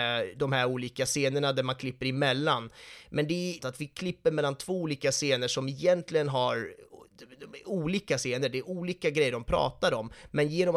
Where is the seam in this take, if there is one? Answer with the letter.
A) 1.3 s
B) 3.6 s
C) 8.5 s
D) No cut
B